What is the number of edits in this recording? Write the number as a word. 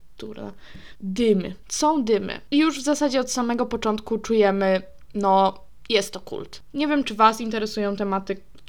two